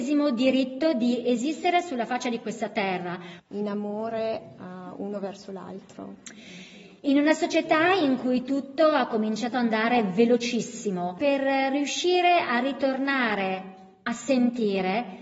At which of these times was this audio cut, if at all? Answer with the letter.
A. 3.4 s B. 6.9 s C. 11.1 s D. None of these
A